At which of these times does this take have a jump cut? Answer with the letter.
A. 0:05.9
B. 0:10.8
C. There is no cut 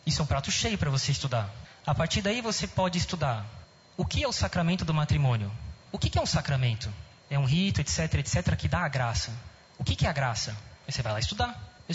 A